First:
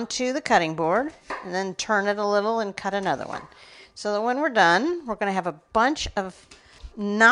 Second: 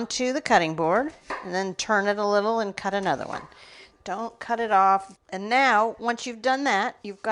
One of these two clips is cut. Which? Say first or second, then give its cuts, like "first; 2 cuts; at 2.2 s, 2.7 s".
second; 2 cuts; at 3.9 s, 5.1 s